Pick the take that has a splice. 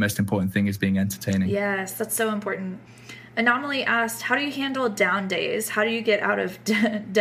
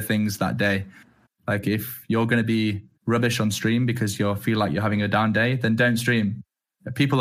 second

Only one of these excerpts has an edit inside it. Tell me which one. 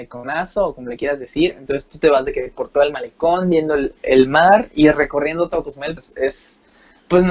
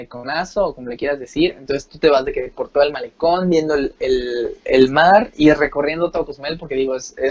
first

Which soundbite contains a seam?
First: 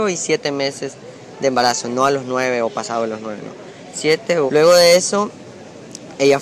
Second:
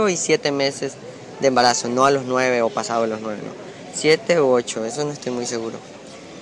first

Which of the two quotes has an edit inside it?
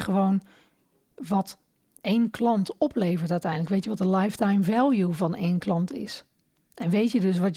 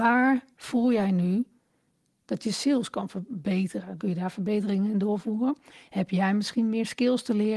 second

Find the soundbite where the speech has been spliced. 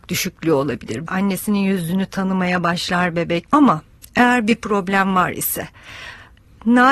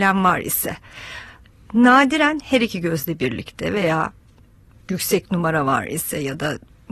first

